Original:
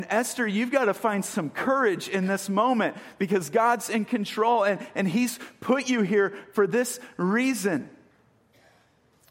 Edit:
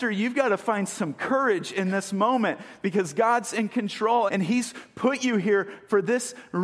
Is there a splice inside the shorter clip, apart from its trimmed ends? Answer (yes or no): yes